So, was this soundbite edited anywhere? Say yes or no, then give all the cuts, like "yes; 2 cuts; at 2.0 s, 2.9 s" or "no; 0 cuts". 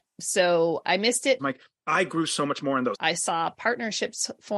yes; 2 cuts; at 1.4 s, 2.9 s